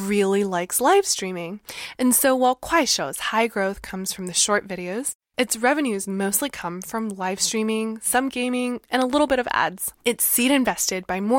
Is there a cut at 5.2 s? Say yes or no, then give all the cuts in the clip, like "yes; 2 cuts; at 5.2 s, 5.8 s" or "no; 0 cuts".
no; 1 cut; at 10.0 s